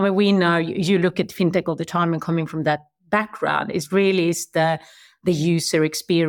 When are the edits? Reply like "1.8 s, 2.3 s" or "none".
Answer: none